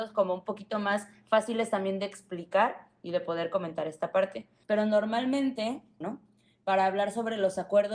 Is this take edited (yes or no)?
yes